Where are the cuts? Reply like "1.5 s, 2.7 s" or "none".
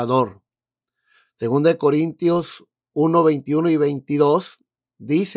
none